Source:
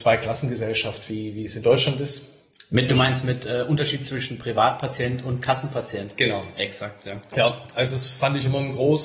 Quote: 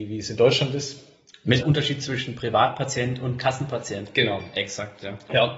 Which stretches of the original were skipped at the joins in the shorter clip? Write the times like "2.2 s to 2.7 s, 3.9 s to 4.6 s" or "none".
2.9 s to 3.6 s